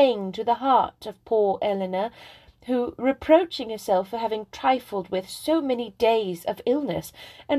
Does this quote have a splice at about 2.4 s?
no; 0 cuts

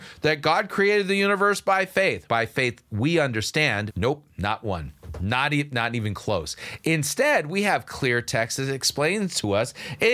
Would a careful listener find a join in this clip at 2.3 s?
yes; 2 cuts; at 2.3 s, 3.9 s

